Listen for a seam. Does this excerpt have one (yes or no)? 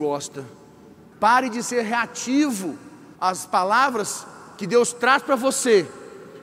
yes